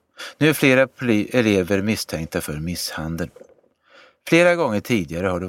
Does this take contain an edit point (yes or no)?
no